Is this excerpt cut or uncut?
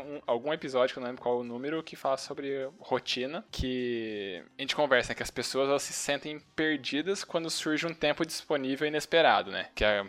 uncut